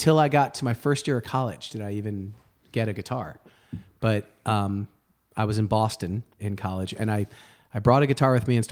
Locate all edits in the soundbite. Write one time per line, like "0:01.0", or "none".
0:06.4